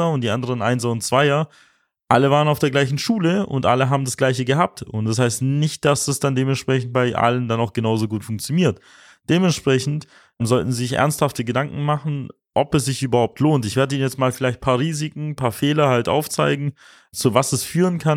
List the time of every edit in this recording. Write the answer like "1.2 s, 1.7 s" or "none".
none